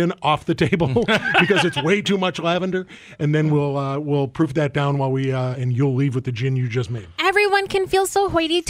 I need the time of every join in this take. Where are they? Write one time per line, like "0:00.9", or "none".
0:05.5